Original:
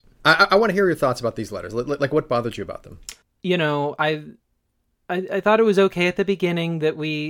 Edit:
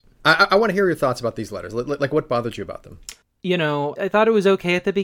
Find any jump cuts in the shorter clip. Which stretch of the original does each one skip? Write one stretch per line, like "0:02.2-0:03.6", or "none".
0:04.0-0:05.3